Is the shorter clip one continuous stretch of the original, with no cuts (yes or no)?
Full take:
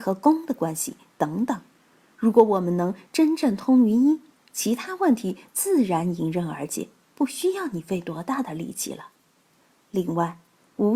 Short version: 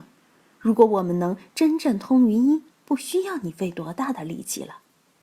no